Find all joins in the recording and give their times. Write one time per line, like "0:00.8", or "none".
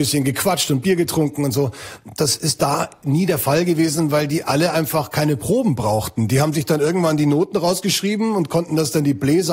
none